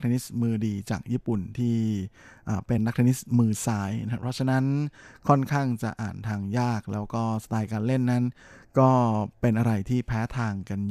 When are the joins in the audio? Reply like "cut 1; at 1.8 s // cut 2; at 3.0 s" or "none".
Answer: cut 1; at 2.8 s